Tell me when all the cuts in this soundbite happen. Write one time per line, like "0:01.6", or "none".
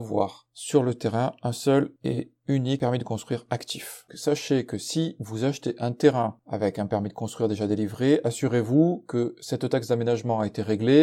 0:04.1